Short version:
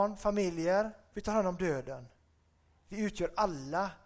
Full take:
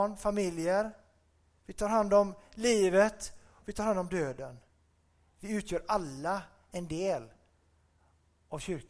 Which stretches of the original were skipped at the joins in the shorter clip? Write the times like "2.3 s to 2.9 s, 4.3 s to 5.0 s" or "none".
1.1 s to 3.6 s